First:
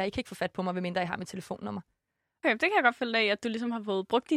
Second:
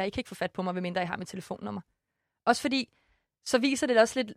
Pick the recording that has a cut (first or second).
first